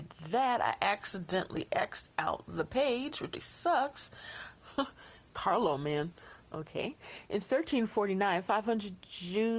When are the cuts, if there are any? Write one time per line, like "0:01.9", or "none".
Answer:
0:03.3
0:04.5